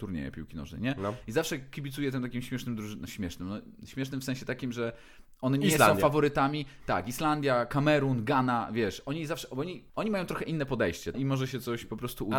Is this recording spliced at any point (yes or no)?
yes